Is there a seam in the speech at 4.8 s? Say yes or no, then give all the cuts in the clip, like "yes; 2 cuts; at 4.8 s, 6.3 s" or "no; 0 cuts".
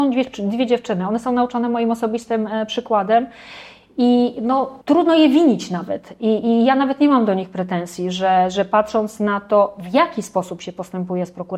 yes; 1 cut; at 4.8 s